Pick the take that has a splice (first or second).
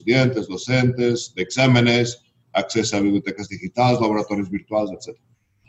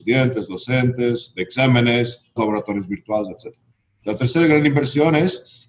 second